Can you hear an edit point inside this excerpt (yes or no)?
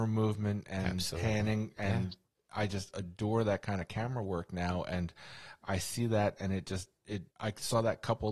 yes